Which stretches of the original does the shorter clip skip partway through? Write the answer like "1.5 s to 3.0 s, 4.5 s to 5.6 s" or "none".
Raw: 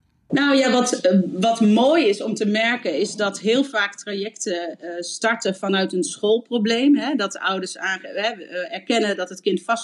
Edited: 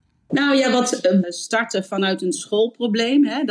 1.2 s to 4.9 s